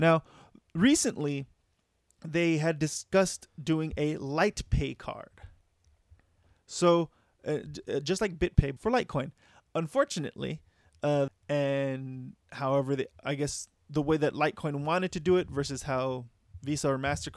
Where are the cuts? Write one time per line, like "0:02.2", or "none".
0:08.8
0:11.3